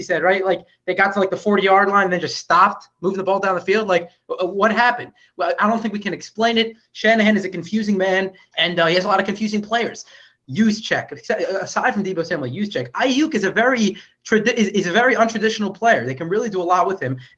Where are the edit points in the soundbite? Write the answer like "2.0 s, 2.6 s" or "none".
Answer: 8.5 s, 10.4 s